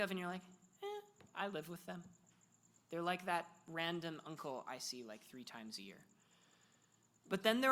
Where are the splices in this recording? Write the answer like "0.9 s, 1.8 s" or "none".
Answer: none